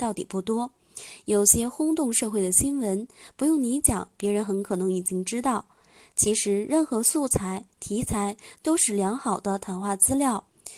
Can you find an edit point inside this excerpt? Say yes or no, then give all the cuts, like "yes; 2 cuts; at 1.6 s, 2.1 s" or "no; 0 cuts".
no; 0 cuts